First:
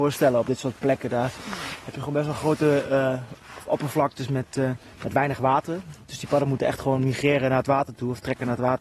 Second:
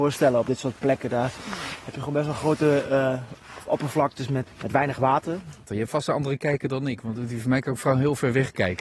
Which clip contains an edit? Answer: second; 2 cuts; at 4.5 s, 5.7 s

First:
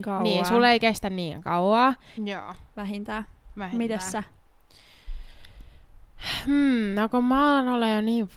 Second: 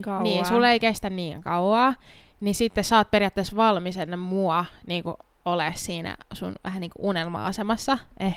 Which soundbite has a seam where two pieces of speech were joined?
first; 1 cut; at 2.2 s

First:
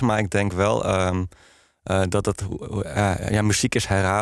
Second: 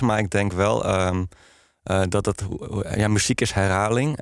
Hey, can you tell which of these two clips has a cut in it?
second; 1 cut; at 2.9 s

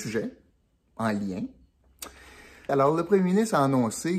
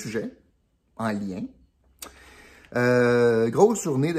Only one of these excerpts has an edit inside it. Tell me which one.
first; 1 cut; at 2.7 s

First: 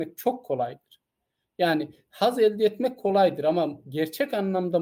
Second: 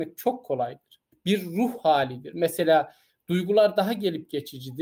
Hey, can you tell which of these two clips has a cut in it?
second; 1 cut; at 1.1 s

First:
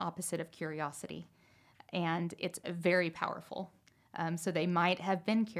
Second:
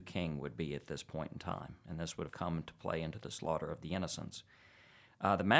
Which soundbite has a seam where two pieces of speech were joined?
second; 1 cut; at 2.3 s

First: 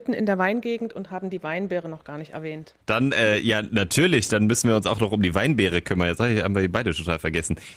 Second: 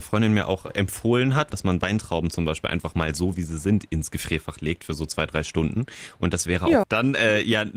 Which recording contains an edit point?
second; 2 cuts; at 1.5 s, 6.8 s

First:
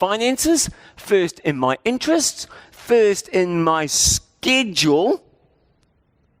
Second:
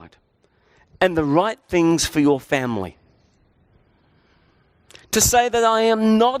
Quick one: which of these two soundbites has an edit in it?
first; 1 cut; at 2.6 s

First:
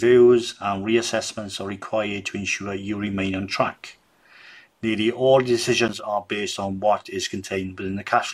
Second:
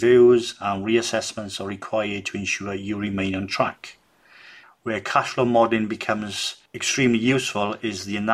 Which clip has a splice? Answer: second; 1 cut; at 4.6 s

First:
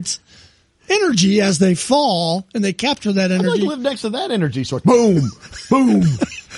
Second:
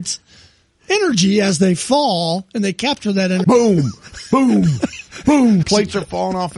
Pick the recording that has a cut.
second; 2 cuts; at 3.4 s, 5.6 s

